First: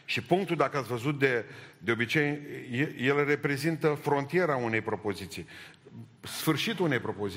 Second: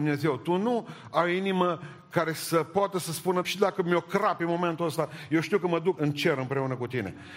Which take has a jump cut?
second; 2 cuts; at 3.4 s, 6.0 s

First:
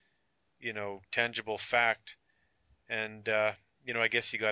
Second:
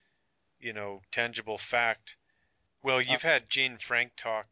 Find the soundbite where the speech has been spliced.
second; 1 cut; at 2.7 s

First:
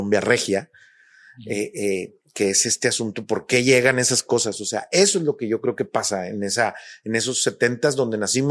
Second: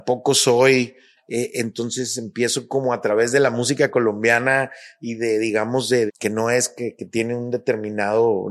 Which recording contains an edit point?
second; 2 cuts; at 1.2 s, 6.1 s

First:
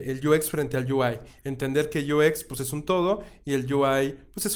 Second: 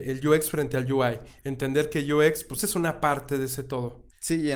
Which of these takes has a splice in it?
second; 1 cut; at 2.6 s

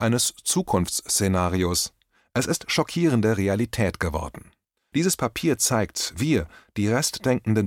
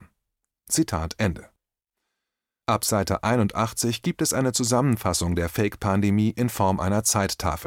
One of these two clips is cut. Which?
first; 1 cut; at 4.9 s

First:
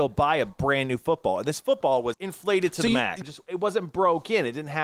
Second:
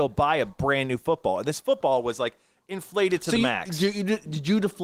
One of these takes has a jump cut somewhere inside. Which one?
first; 2 cuts; at 2.1 s, 3.2 s

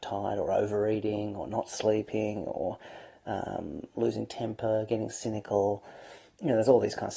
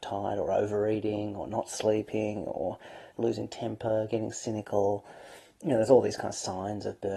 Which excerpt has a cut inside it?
second; 1 cut; at 3.1 s

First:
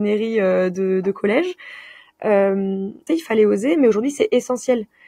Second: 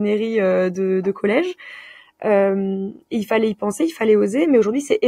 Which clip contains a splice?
first; 1 cut; at 3.1 s

